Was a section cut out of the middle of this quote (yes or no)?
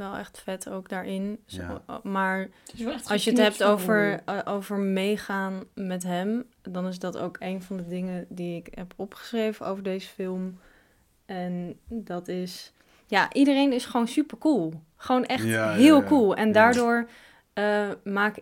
no